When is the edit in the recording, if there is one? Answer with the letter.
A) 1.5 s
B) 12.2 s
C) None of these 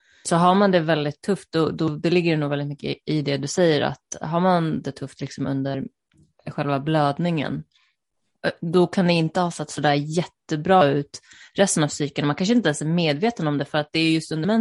C